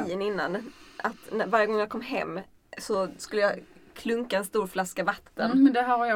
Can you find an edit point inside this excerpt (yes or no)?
no